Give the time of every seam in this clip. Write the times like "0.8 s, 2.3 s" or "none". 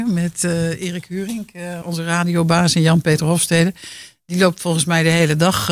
1.8 s